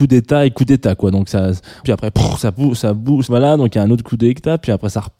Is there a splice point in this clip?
yes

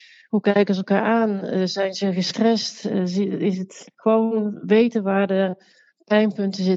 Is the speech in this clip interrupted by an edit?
no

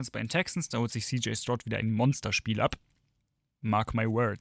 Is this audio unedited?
yes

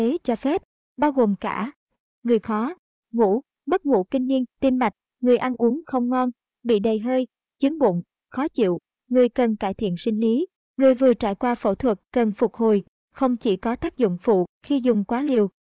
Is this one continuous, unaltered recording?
no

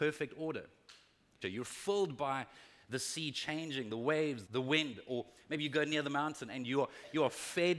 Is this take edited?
yes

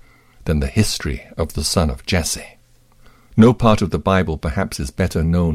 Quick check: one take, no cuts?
no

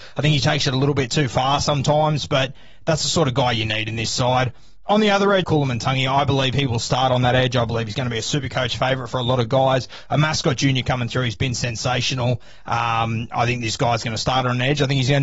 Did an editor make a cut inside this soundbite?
yes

